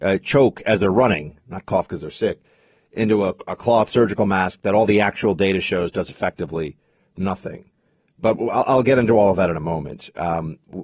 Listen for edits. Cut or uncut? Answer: uncut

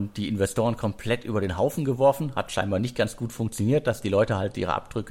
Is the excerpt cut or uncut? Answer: uncut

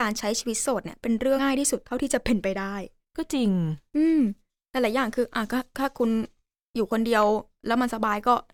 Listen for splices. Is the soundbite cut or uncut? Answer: cut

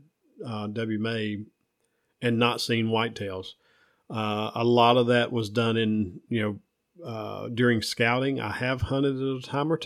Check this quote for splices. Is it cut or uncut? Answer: uncut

